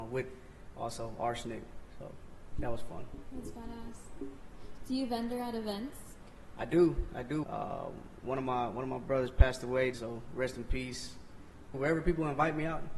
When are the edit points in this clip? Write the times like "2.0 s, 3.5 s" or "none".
7.4 s, 9.9 s, 11.7 s